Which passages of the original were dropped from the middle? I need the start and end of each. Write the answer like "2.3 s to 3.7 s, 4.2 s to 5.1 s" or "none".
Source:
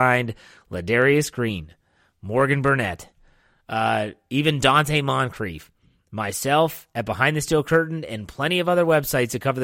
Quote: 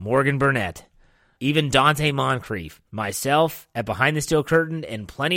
3.6 s to 4.2 s, 5.8 s to 6.1 s